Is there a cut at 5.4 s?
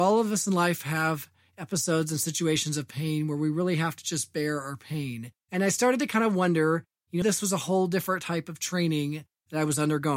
yes; 2 cuts; at 5.4 s, 7.2 s

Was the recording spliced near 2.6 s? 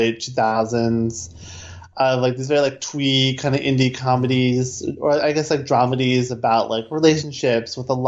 no; 0 cuts

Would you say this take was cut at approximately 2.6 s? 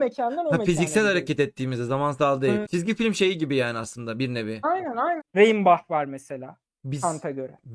yes; 3 cuts; at 2.6 s, 5.2 s, 6.6 s

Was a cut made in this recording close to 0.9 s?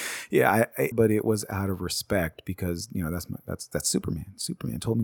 yes; 1 cut; at 0.9 s

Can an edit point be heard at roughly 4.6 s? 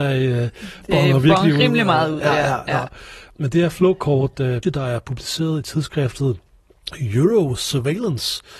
yes; 1 cut; at 4.6 s

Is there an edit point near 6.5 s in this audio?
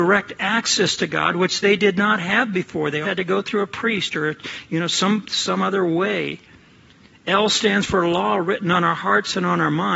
no; 1 cut; at 3.0 s

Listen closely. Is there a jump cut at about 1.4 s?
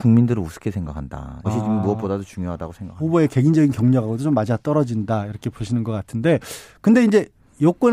yes; 1 cut; at 1.4 s

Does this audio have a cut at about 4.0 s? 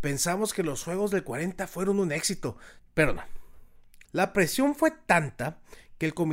yes; 2 cuts; at 2.8 s, 4.0 s

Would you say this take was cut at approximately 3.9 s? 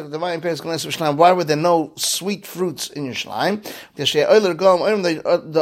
yes; 1 cut; at 3.9 s

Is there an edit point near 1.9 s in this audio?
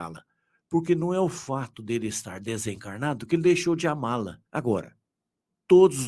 no; 1 cut; at 4.4 s

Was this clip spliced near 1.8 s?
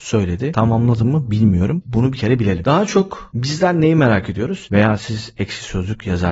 yes; 2 cuts; at 1.8 s, 4.7 s

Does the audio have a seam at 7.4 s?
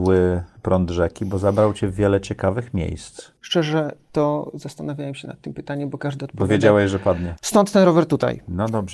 yes; 2 cuts; at 3.4 s, 7.4 s

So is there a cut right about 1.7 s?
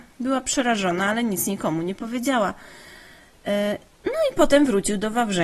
no; 1 cut; at 3.9 s

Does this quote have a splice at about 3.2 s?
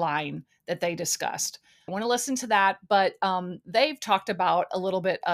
no; 1 cut; at 1.9 s

